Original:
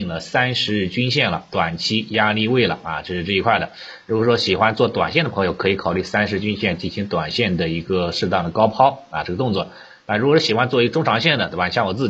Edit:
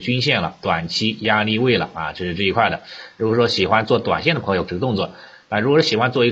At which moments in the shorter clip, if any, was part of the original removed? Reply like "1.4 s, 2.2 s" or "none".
4.7 s